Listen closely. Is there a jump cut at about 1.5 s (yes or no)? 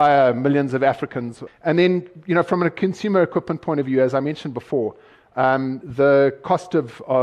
yes